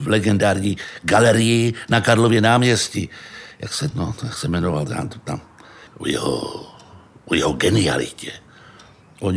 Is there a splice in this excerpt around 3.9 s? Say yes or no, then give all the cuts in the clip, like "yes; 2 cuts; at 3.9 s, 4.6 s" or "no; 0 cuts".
yes; 2 cuts; at 3.9 s, 5.9 s